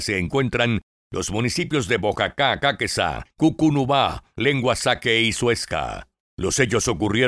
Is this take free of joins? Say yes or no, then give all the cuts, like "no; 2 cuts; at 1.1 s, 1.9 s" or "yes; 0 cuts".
no; 1 cut; at 6.2 s